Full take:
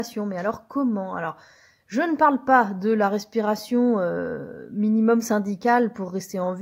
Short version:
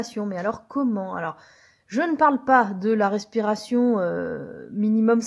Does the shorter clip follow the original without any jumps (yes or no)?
yes